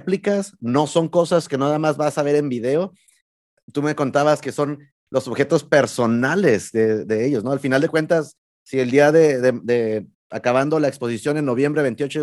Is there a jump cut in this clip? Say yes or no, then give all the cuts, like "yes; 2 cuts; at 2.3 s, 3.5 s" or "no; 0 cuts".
no; 0 cuts